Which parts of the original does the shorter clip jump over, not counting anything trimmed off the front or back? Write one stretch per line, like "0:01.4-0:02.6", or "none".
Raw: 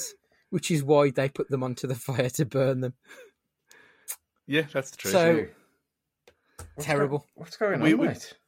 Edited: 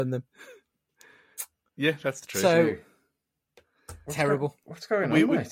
none